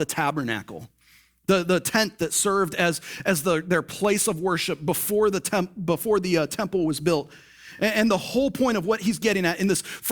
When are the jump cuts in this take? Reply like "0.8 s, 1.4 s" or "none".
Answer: none